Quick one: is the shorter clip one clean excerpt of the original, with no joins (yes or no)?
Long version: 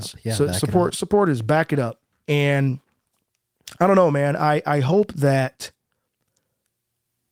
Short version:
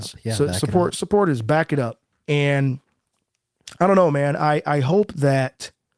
yes